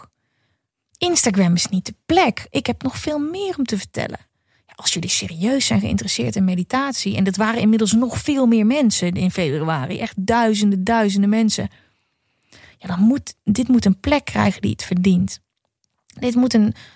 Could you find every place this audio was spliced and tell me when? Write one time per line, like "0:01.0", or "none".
none

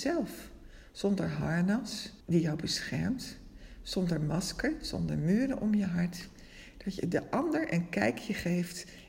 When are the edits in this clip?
0:02.2

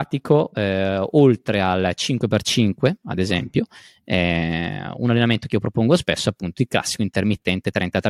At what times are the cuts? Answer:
none

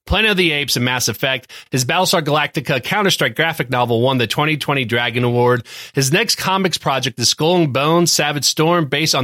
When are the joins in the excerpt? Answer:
none

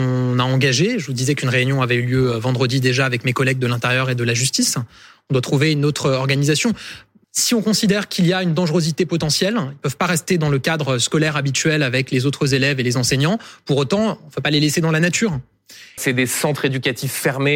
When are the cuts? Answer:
0:07.2
0:16.0

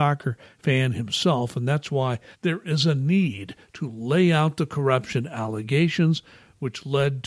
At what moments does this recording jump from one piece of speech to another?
0:02.3

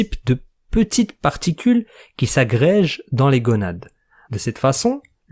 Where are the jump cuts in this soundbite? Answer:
0:04.2

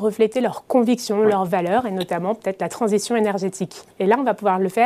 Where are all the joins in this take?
0:03.9

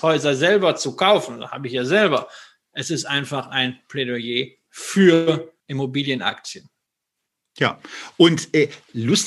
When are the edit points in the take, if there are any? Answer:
0:05.6

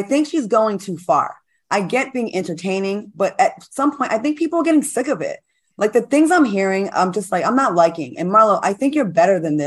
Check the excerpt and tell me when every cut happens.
none

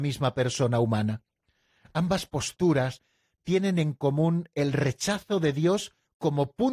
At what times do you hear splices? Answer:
none

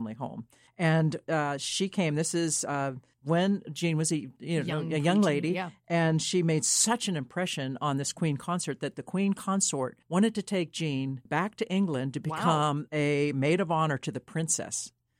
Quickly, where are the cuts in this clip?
0:11.3

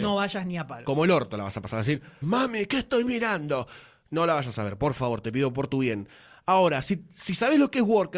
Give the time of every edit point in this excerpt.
0:02.2

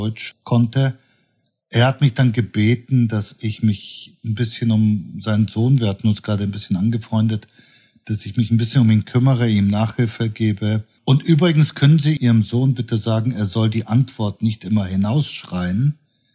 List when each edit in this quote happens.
0:11.0

